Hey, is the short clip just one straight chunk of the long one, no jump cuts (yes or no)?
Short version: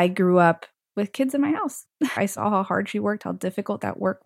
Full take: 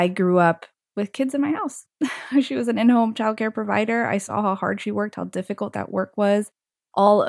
no